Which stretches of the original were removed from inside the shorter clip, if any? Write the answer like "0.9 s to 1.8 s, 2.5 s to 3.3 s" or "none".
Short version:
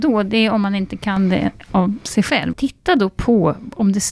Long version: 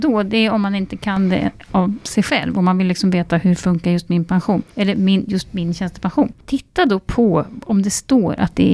2.5 s to 6.4 s